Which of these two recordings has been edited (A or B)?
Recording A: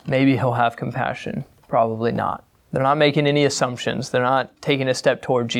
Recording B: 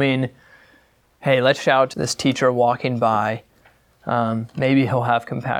B